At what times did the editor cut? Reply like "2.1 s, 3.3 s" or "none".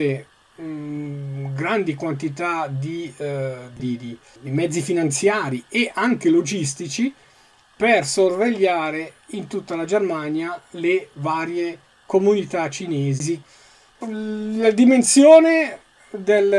3.8 s, 13.9 s